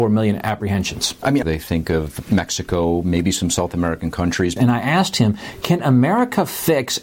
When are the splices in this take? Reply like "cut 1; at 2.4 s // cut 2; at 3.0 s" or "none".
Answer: cut 1; at 1.4 s // cut 2; at 4.6 s